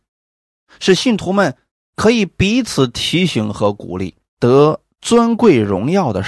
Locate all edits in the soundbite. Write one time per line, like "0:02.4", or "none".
0:04.3